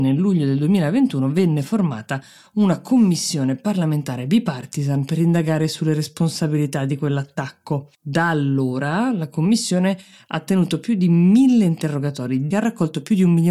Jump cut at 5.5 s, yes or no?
no